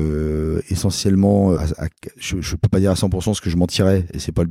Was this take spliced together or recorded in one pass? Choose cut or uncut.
cut